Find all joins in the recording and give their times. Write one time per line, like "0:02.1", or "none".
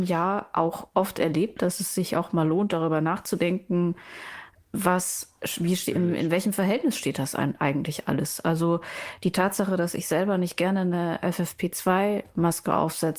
none